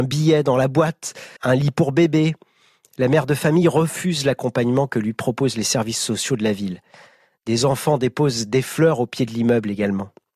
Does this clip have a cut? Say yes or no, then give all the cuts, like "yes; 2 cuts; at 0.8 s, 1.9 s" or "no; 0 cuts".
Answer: yes; 1 cut; at 1.4 s